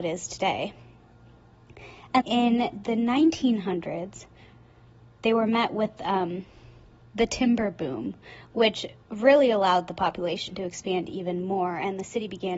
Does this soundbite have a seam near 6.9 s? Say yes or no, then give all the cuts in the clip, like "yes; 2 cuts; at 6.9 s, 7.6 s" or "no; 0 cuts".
no; 1 cut; at 2.2 s